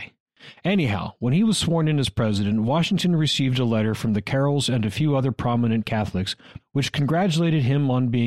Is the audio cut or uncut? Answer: cut